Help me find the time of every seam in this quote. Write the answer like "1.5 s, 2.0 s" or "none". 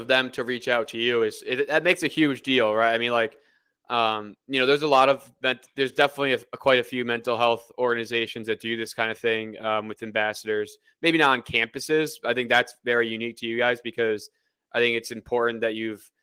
none